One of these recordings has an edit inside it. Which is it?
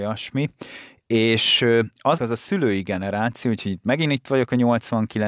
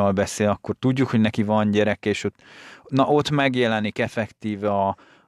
first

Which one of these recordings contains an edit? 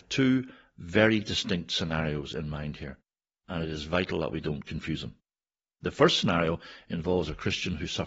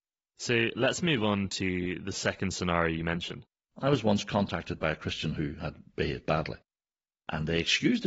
second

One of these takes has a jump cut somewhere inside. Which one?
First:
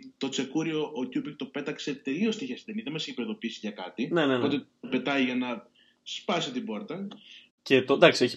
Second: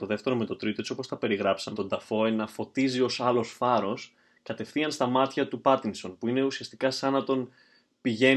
second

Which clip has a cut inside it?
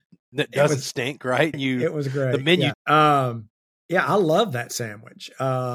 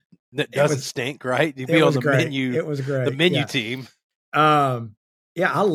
first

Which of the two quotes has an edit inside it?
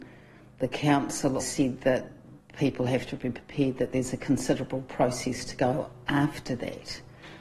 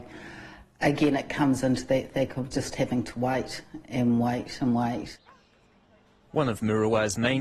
first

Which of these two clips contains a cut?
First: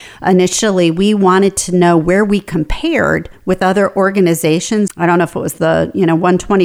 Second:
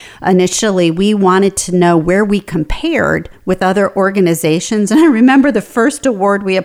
first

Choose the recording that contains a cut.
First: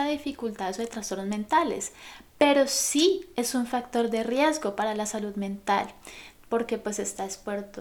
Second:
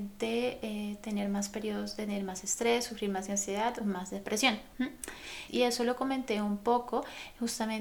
second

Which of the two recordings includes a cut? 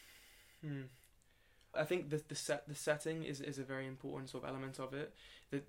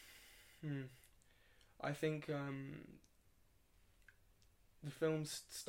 first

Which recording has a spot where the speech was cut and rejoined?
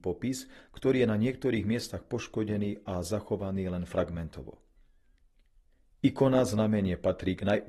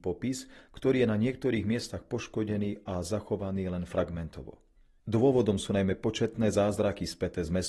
second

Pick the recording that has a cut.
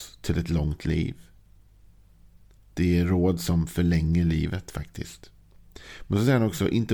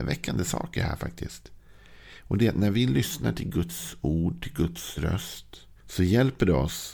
second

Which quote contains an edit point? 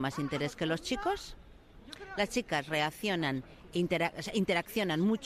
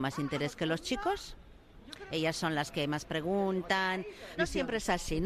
second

